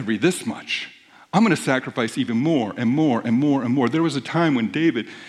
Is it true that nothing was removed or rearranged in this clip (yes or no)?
yes